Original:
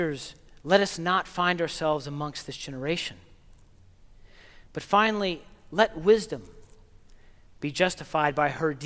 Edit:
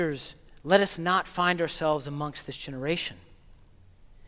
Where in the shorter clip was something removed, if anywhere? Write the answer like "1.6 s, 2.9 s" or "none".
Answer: none